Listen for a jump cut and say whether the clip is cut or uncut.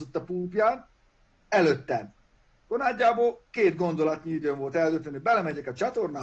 uncut